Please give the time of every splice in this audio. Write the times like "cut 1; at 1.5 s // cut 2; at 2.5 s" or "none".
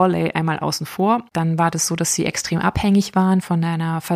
cut 1; at 1.3 s